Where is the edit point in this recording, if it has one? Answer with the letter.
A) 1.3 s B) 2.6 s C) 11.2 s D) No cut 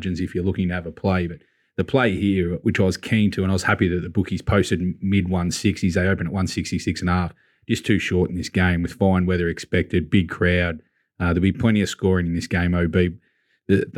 D